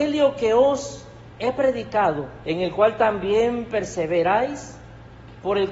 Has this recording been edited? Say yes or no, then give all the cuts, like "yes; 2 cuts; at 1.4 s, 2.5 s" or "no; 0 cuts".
yes; 1 cut; at 2.4 s